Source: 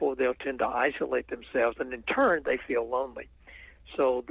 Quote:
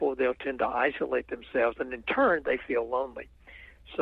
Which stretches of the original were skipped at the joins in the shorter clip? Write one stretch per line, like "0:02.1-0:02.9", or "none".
none